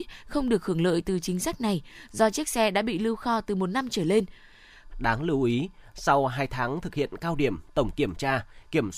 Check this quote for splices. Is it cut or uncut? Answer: cut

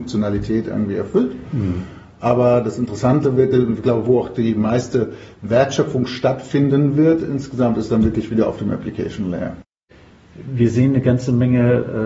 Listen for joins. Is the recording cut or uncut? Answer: uncut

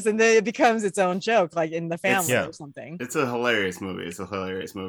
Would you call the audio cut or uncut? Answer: uncut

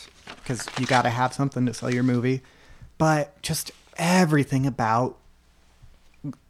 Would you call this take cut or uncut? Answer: uncut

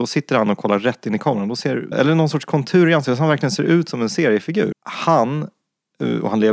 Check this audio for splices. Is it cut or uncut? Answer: cut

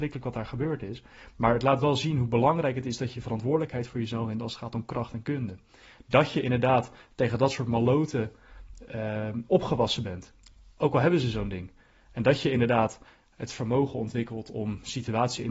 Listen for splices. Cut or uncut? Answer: uncut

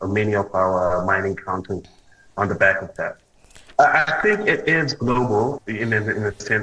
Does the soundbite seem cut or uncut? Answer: cut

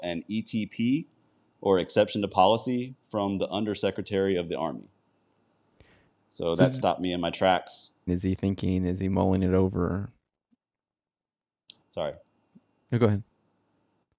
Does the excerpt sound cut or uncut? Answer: cut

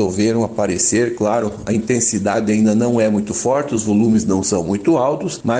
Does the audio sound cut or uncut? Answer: uncut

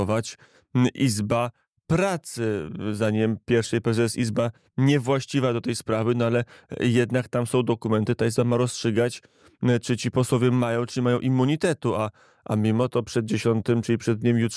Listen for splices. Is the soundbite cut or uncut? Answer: uncut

